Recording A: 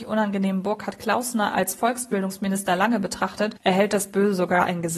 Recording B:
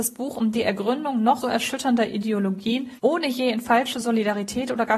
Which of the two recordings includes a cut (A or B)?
B